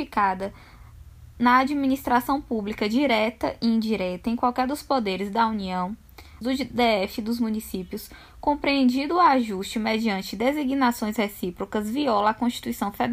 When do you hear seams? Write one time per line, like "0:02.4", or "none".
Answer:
0:01.3
0:06.4